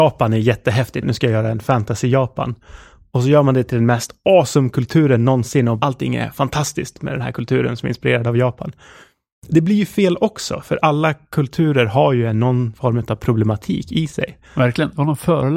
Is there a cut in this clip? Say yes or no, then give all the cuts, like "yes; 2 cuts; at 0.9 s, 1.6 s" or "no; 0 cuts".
yes; 1 cut; at 1.0 s